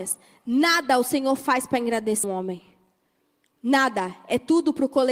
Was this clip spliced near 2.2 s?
yes; 1 cut; at 2.2 s

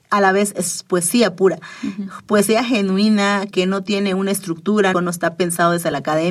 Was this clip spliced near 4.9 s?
yes; 2 cuts; at 3.5 s, 4.9 s

